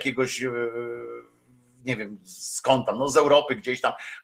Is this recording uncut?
yes; 0 cuts

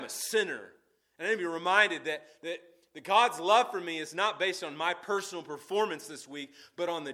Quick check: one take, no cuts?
yes; 0 cuts

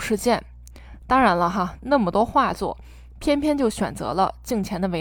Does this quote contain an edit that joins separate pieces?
yes; 1 cut; at 1.8 s

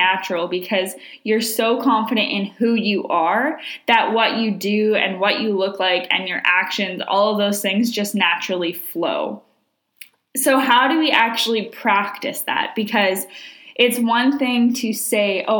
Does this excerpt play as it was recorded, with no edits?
yes; 0 cuts

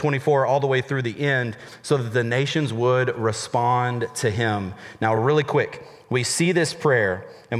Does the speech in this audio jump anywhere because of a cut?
no; 0 cuts

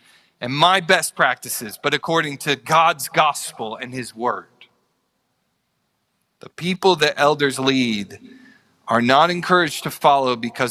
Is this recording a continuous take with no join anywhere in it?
yes; 0 cuts

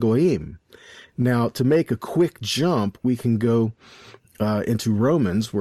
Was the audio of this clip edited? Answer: no; 0 cuts

